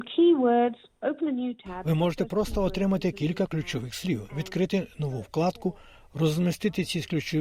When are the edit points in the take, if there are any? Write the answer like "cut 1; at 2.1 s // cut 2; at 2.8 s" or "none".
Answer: none